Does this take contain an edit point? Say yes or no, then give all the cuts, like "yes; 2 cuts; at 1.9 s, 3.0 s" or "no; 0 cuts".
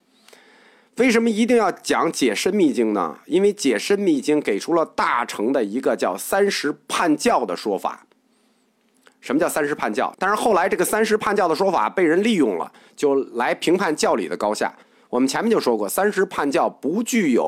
yes; 1 cut; at 10.1 s